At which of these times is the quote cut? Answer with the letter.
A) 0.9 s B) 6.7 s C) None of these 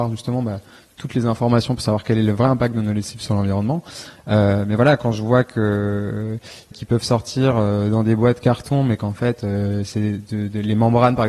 B